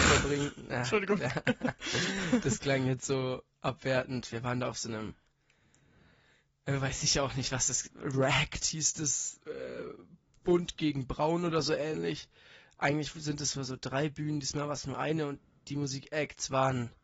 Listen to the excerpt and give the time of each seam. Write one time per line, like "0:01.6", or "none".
0:07.9